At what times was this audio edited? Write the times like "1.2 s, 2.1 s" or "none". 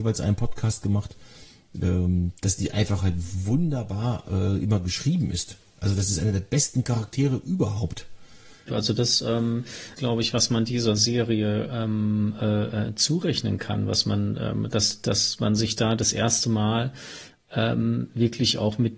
8.7 s, 10.0 s